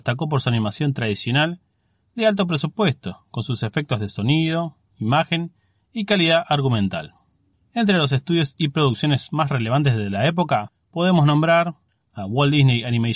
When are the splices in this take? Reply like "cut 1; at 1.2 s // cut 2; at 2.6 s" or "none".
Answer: none